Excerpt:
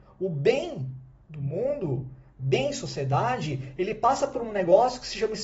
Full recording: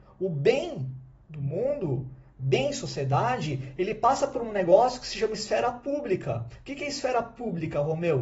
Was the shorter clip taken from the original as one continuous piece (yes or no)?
yes